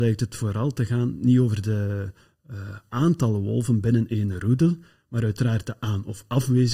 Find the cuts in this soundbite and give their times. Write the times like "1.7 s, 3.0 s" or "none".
none